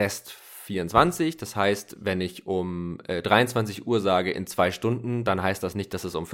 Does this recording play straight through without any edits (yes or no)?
yes